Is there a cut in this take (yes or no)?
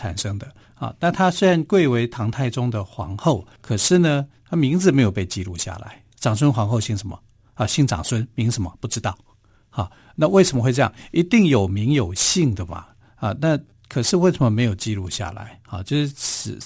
yes